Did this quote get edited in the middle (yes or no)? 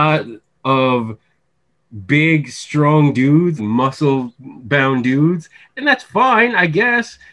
yes